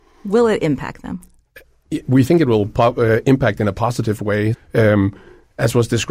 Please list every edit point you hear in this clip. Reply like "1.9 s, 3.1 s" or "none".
4.5 s